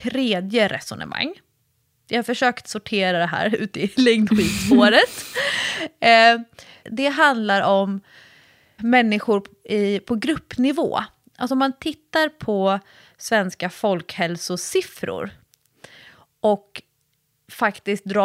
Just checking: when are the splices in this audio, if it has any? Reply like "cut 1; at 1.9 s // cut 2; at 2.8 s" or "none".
cut 1; at 6.8 s // cut 2; at 8.8 s